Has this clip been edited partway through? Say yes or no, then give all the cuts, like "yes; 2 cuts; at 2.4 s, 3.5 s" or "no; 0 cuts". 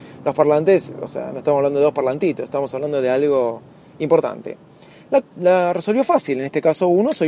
yes; 1 cut; at 5.2 s